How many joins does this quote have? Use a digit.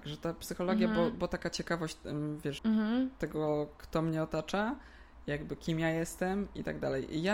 1